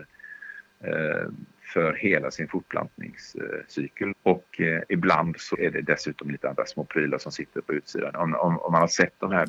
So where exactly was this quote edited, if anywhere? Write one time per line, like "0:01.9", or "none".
0:04.1
0:05.5